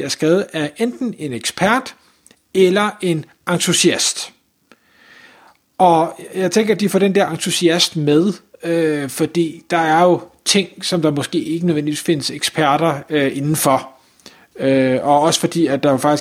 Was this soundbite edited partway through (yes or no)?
no